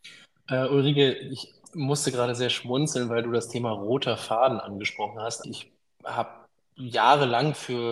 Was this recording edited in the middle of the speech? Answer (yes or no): yes